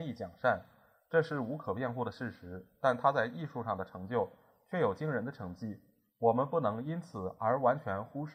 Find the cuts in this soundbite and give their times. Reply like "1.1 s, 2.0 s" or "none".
none